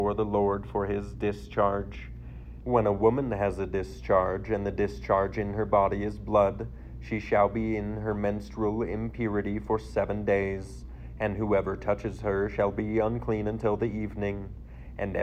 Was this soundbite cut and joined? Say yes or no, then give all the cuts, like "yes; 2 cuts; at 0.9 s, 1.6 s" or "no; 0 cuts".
yes; 1 cut; at 2.6 s